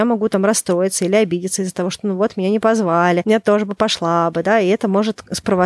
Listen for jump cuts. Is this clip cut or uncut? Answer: uncut